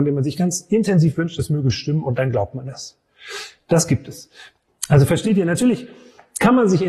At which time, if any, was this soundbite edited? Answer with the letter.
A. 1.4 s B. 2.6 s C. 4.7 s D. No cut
C